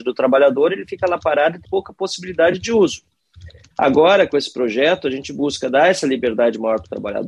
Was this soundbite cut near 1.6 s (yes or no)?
yes